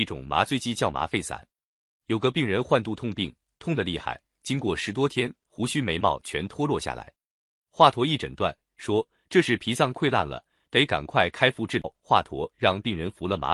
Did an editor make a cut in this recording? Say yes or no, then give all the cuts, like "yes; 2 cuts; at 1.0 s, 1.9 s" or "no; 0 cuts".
no; 0 cuts